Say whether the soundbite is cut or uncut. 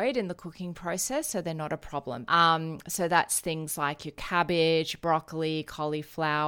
cut